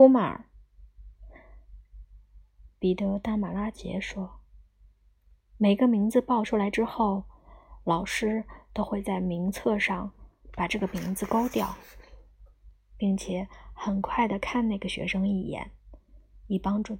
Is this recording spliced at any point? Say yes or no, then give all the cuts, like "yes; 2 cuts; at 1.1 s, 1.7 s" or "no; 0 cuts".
yes; 1 cut; at 2.0 s